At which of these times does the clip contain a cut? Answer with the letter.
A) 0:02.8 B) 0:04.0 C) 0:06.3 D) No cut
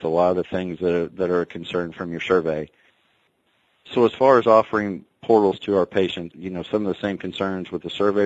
C